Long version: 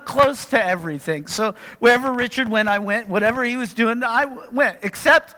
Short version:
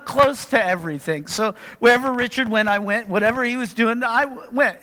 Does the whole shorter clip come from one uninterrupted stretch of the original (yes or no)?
yes